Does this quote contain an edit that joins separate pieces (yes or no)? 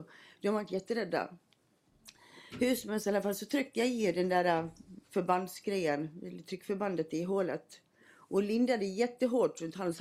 no